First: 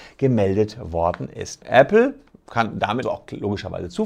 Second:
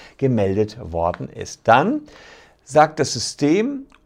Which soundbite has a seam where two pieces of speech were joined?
first; 2 cuts; at 1.6 s, 3.0 s

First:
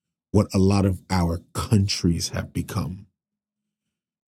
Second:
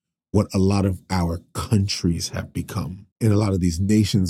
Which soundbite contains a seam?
second; 1 cut; at 3.1 s

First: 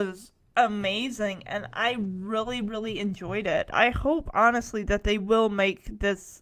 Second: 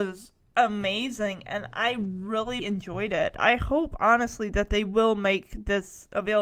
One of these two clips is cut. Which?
second; 1 cut; at 2.6 s

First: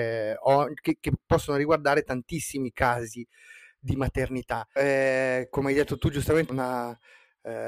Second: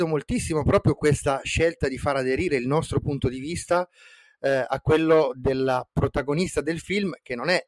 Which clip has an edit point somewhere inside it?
first; 2 cuts; at 4.8 s, 6.5 s

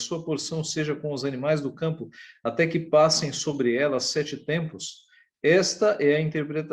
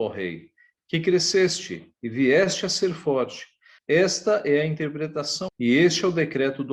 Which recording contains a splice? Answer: second; 2 cuts; at 3.8 s, 5.5 s

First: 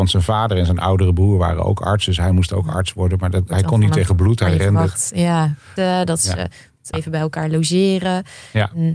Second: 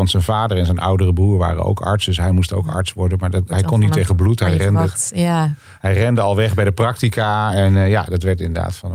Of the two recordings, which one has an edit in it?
first; 2 cuts; at 5.8 s, 6.9 s

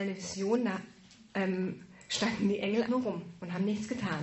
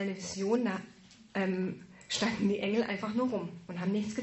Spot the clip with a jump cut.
first; 1 cut; at 2.9 s

